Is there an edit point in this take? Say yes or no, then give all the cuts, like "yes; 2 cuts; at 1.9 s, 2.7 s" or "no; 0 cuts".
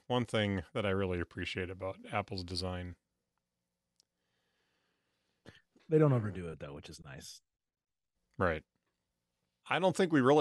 no; 0 cuts